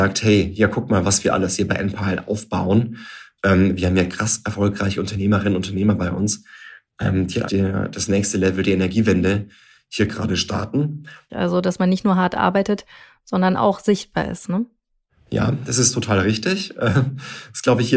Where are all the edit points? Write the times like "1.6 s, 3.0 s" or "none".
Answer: 7.5 s, 11.3 s